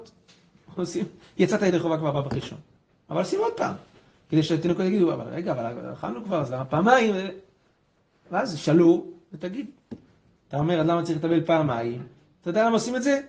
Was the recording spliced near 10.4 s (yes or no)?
yes